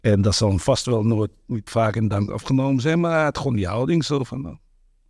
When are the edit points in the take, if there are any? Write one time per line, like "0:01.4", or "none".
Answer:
0:01.7